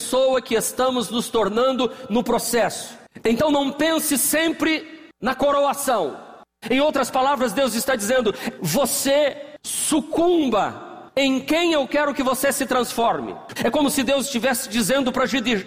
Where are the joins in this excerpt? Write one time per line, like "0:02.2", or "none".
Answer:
0:06.6
0:08.6
0:13.6